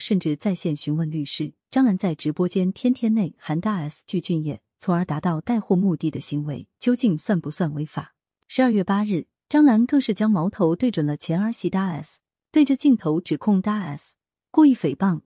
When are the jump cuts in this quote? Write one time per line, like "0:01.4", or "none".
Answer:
0:08.4
0:12.4